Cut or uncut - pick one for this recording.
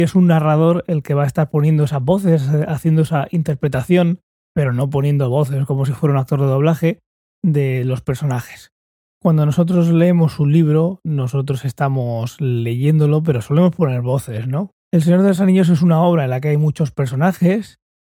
cut